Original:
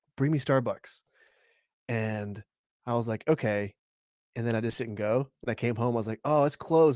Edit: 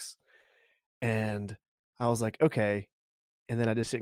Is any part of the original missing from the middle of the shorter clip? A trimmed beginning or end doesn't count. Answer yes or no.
no